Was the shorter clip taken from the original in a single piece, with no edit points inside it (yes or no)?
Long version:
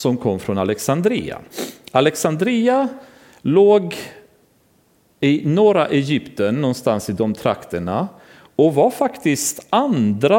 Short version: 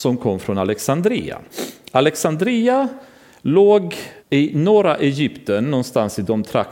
no